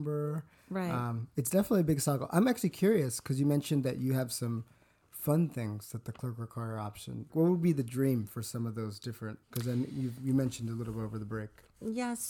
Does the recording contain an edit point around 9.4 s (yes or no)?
yes